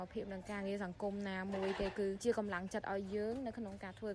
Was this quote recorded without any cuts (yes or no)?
yes